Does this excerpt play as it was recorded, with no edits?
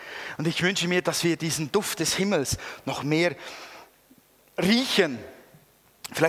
yes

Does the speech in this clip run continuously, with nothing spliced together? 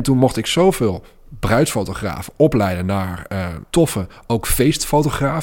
no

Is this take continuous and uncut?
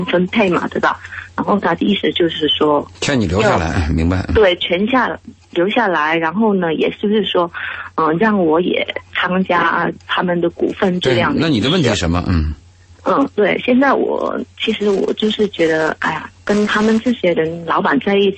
yes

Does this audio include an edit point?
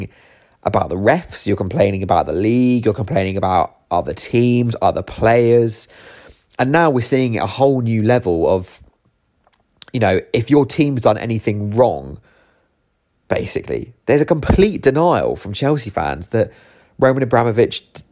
yes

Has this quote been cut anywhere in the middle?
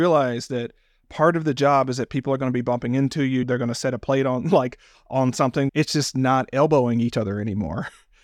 yes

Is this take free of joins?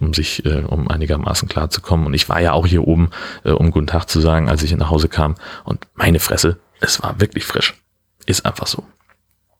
yes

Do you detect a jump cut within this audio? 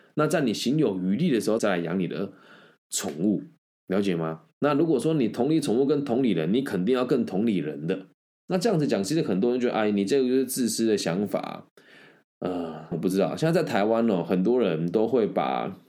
yes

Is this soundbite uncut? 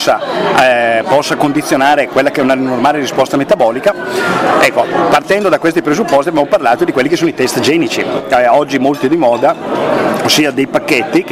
yes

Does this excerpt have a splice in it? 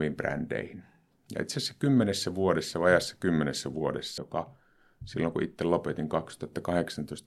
yes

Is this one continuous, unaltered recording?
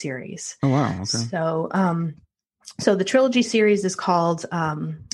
yes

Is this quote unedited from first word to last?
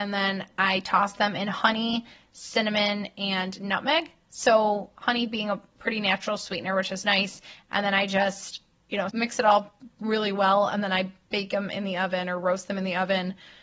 no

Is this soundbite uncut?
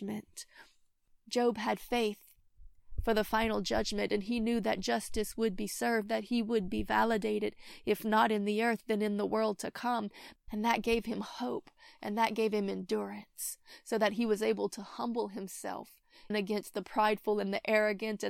no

